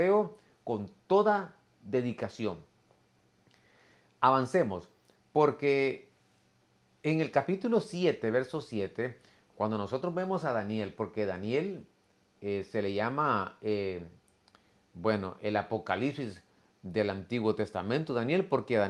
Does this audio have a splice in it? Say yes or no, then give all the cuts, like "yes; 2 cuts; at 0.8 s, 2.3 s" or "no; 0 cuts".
no; 0 cuts